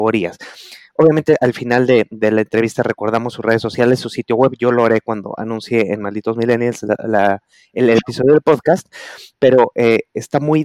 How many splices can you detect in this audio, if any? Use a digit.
0